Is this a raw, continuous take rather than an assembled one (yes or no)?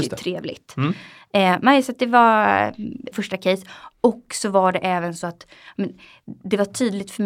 no